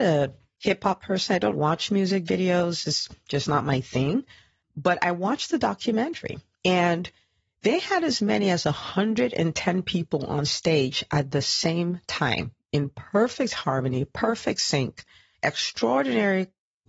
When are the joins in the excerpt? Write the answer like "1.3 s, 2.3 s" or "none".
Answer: 1.5 s, 15.3 s

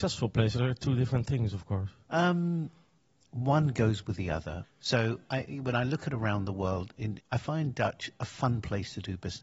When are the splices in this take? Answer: 4.6 s, 7.2 s

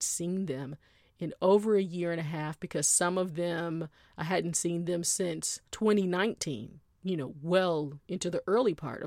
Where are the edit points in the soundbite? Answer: 5.7 s, 7.0 s

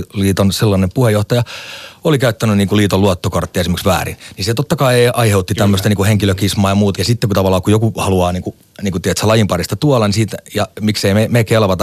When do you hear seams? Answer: 6.9 s

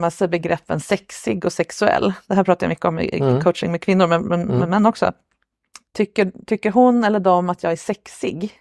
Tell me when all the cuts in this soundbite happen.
5.8 s

